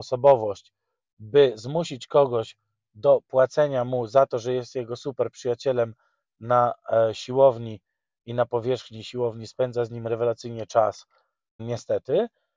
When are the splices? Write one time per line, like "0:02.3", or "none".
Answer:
0:11.6